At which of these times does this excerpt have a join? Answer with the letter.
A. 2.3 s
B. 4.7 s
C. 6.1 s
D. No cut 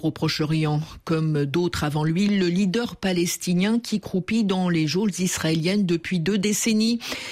A